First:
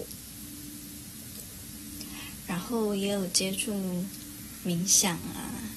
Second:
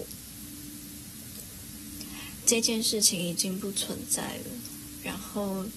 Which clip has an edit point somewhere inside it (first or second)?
second